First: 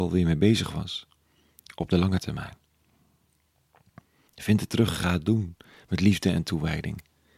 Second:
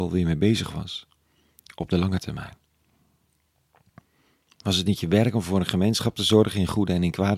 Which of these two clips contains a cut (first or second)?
first